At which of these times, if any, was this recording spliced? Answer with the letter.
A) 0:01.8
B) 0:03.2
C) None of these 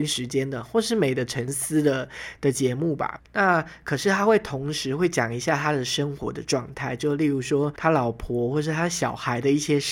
B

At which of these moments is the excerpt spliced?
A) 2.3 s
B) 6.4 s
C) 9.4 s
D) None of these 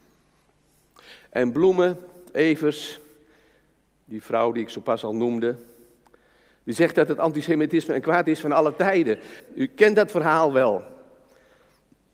C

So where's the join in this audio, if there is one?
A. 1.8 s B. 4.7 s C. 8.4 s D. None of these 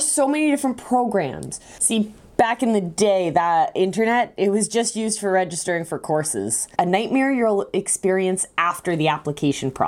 A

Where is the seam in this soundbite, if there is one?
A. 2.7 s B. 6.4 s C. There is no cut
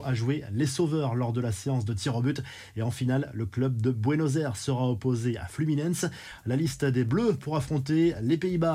C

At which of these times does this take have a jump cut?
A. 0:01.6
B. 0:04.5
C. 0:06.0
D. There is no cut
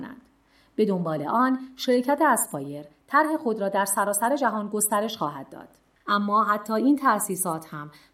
C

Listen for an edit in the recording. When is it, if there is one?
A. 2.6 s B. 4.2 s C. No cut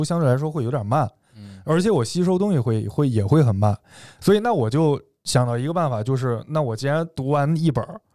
B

